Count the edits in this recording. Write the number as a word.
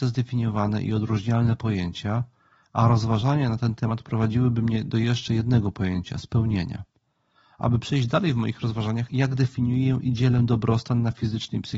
one